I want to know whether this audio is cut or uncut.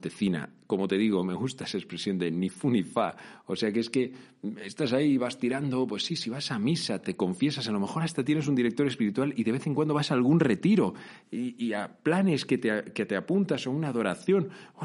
uncut